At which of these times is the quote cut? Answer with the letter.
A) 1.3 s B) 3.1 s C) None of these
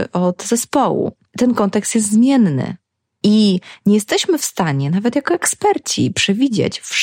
A